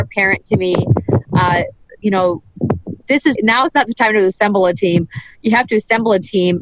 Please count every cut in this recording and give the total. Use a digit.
2